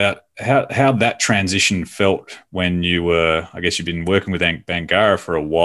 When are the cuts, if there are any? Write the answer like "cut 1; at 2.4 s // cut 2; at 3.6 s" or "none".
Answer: none

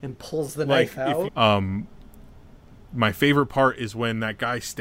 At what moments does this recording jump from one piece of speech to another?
cut 1; at 1.3 s

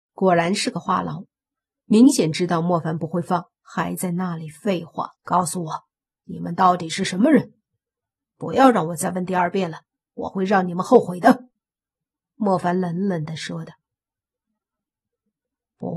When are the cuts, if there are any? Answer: cut 1; at 5.2 s

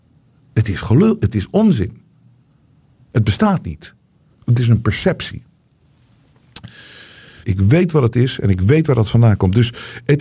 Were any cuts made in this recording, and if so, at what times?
cut 1; at 7.4 s

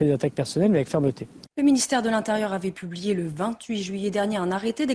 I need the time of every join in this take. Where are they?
cut 1; at 1.5 s

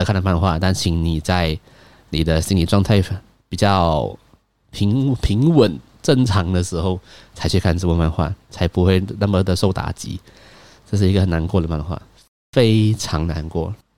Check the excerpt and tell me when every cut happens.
none

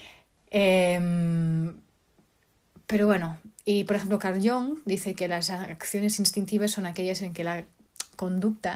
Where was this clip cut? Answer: none

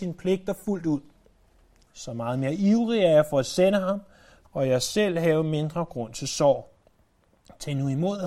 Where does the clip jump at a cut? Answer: cut 1; at 1.9 s // cut 2; at 4.4 s

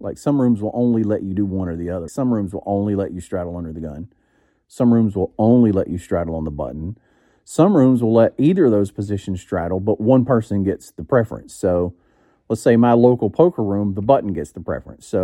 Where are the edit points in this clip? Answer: cut 1; at 2.1 s

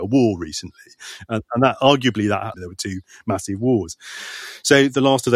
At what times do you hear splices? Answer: cut 1; at 2.5 s

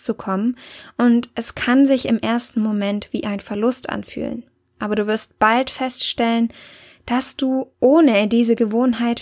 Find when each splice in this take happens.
none

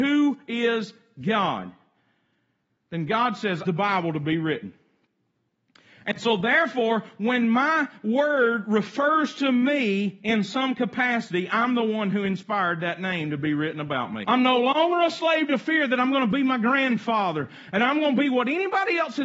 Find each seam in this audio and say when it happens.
cut 1; at 3.6 s // cut 2; at 14.2 s

